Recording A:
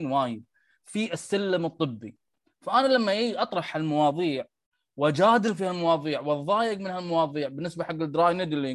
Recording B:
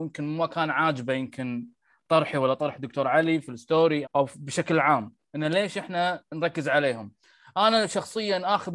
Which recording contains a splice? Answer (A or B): B